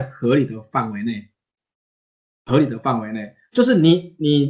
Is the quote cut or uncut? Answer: uncut